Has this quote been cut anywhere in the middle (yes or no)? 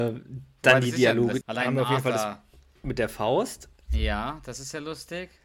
yes